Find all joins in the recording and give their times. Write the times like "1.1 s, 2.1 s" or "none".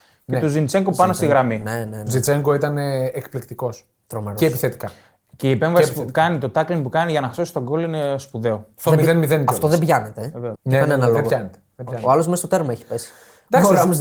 10.5 s